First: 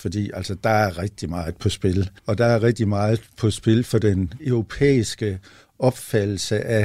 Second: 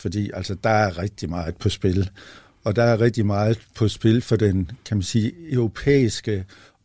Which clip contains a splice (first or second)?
first